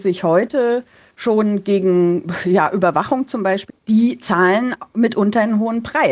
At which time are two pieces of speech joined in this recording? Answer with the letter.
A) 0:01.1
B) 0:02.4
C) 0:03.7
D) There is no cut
C